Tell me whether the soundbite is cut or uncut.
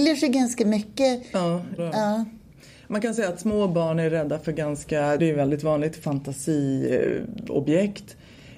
cut